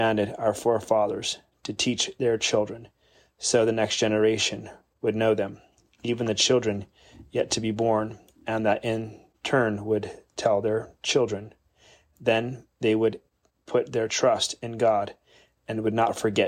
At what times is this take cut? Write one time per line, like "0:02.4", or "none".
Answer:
none

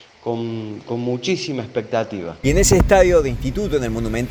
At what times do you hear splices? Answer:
0:02.4

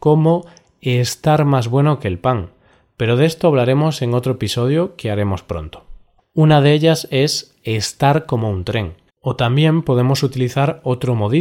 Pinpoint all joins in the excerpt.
0:06.2
0:09.1

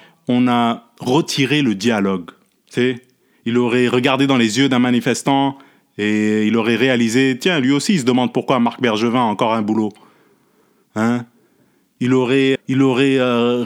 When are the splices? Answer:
0:02.6
0:12.6

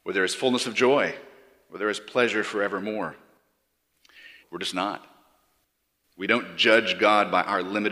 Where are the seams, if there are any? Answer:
0:04.4

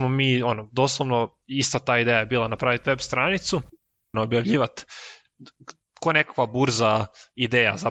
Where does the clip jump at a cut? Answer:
0:01.4
0:04.1

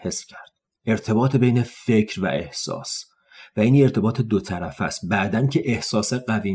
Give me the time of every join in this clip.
none

